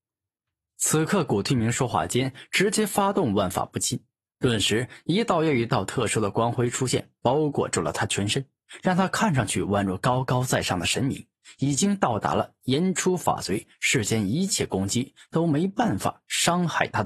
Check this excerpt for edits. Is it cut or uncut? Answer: uncut